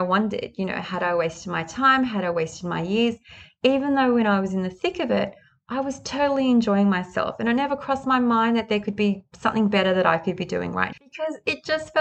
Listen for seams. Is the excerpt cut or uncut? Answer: cut